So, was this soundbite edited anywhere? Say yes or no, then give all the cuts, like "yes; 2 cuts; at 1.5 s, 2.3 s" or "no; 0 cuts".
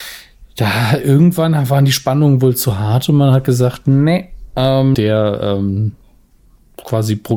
yes; 1 cut; at 4.9 s